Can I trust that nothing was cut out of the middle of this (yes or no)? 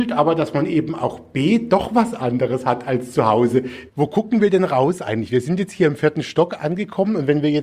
no